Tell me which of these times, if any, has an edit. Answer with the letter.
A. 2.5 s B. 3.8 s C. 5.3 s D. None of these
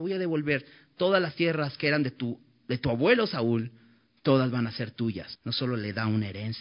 C